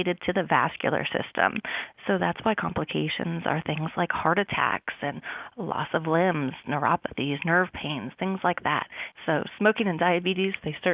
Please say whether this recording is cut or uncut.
cut